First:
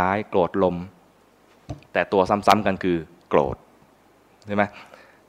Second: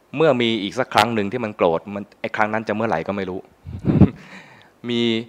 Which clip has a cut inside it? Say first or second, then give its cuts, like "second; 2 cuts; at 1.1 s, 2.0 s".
first; 1 cut; at 1.9 s